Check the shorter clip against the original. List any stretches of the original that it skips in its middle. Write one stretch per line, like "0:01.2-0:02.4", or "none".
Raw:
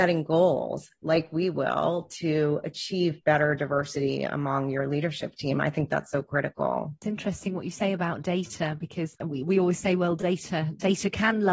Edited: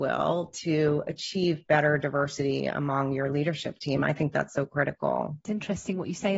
none